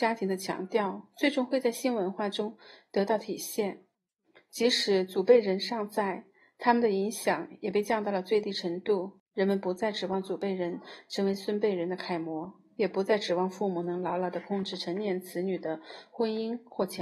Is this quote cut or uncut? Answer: uncut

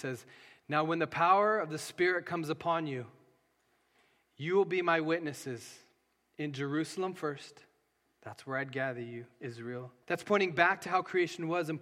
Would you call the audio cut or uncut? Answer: cut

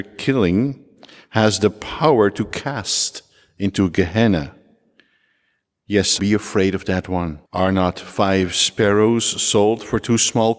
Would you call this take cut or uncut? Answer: cut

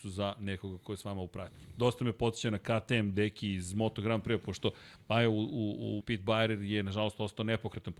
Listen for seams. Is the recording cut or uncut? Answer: cut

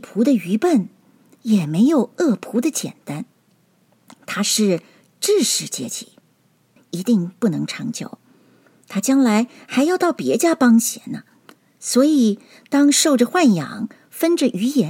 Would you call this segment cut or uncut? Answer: cut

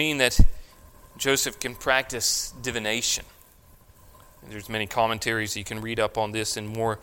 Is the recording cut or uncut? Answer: uncut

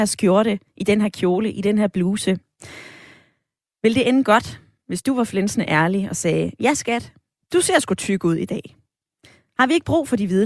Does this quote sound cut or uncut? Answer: uncut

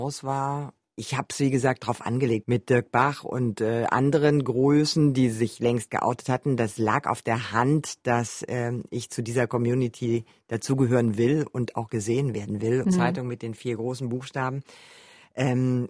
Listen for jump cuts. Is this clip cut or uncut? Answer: cut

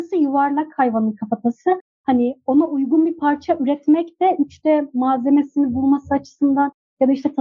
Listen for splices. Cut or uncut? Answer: uncut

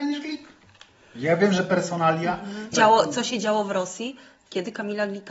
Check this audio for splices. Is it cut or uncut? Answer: cut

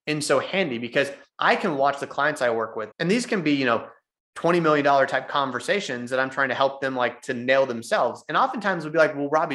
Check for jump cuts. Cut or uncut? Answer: cut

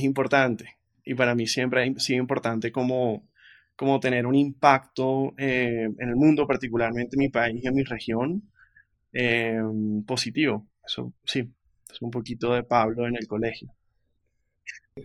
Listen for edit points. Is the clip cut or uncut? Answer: uncut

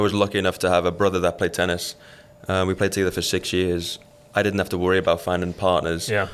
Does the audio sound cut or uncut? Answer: uncut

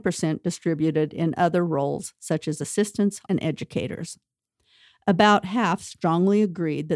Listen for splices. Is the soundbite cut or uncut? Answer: cut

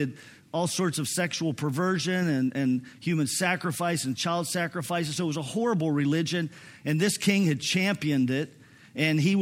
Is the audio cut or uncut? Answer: uncut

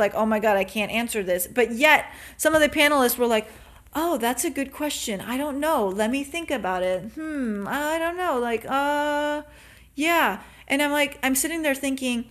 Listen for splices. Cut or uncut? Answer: uncut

